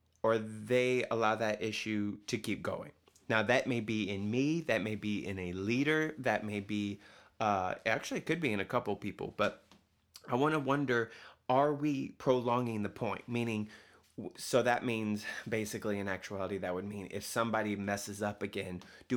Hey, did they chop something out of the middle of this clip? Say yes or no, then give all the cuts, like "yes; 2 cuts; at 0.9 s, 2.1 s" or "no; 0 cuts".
no; 0 cuts